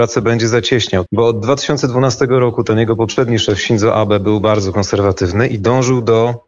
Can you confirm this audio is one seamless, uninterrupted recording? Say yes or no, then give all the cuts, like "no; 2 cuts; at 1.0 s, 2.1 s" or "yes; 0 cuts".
no; 1 cut; at 1.1 s